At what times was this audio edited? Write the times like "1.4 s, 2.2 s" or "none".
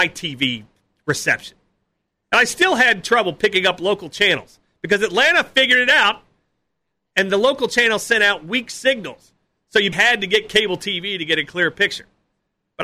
9.9 s